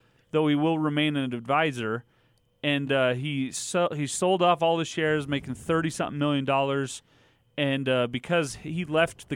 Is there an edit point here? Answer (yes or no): no